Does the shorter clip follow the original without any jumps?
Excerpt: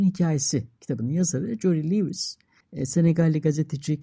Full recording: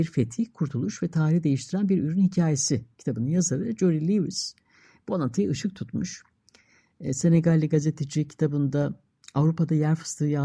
no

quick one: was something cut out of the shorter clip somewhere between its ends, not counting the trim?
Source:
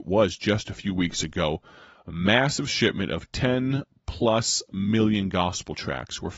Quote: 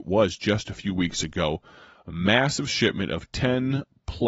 no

